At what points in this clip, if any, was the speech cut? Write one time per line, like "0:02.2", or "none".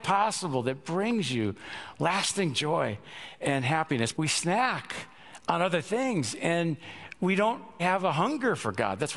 0:04.1
0:07.8